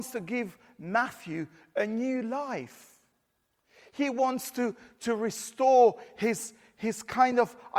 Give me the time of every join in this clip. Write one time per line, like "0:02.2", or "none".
none